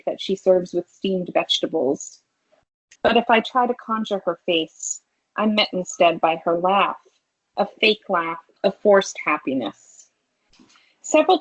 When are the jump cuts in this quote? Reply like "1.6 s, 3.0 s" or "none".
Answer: 3.0 s, 8.6 s